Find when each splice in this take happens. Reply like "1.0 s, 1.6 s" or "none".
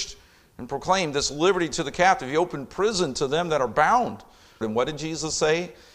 4.6 s